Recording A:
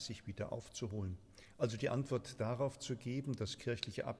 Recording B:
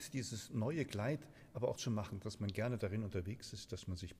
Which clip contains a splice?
B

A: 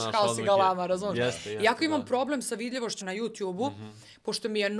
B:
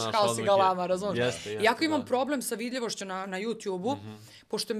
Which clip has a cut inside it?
A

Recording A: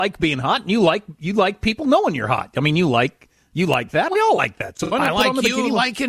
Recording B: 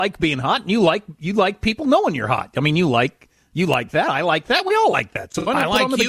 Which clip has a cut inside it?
A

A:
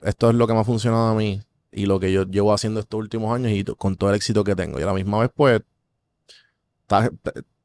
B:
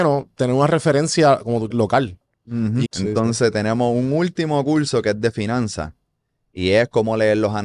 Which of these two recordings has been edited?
B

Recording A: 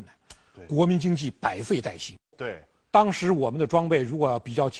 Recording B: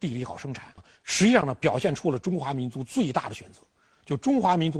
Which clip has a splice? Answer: A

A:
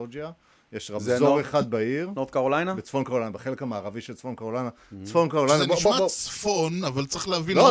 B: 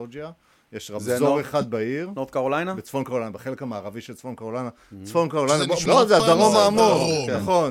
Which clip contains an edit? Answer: B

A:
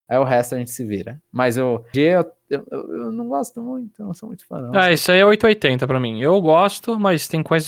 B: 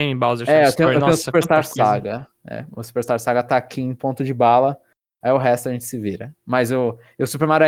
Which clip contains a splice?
A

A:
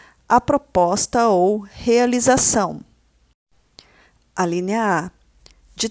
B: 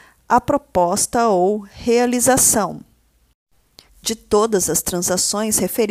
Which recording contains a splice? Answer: B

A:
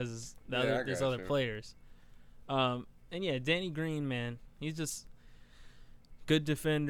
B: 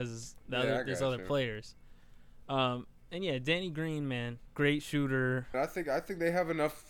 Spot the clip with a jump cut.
B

